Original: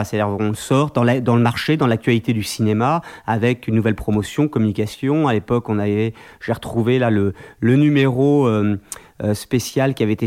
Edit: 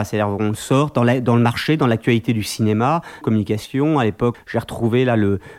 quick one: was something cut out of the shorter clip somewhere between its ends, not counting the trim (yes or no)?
yes